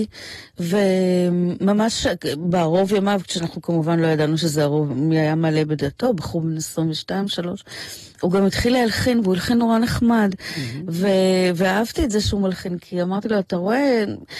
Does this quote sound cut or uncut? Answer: uncut